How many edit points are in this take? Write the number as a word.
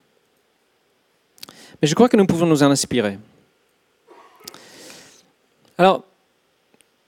zero